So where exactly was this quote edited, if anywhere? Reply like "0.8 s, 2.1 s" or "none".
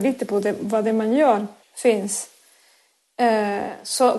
1.6 s